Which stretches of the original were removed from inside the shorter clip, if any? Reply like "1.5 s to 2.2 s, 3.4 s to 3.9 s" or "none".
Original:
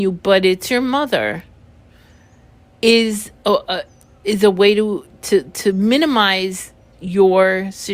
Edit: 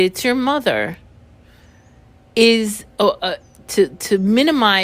4.0 s to 5.1 s